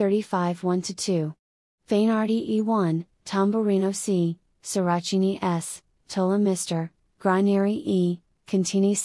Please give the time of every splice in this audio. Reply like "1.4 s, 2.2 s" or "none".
3.1 s